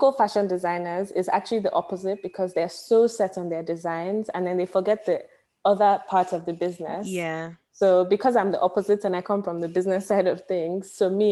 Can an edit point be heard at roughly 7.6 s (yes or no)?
no